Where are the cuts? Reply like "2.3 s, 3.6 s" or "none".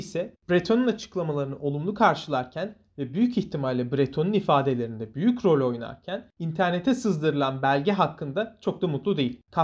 none